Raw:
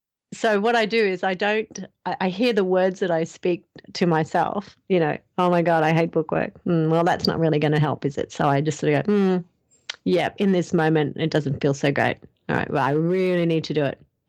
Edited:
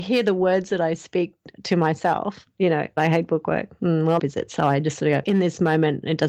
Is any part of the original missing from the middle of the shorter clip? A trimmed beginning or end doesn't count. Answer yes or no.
yes